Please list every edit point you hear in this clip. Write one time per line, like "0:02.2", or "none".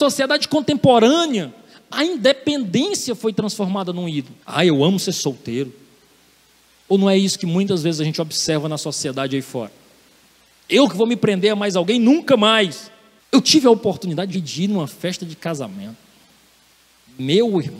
0:04.4
0:13.2
0:14.3